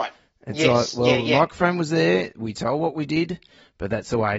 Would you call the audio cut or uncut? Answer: uncut